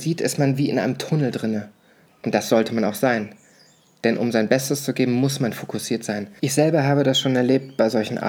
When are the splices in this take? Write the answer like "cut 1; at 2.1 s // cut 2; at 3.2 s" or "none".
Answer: cut 1; at 2.1 s // cut 2; at 6.4 s